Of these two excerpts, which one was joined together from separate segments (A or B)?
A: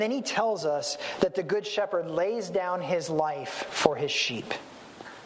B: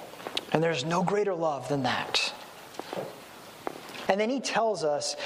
B